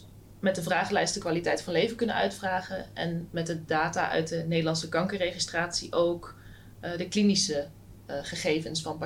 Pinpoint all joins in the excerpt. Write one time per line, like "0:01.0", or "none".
none